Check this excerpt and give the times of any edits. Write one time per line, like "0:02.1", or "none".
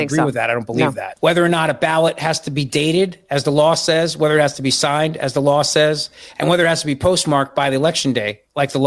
0:01.2